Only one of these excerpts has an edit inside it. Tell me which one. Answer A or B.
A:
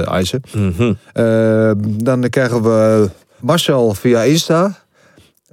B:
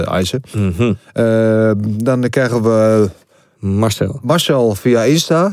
A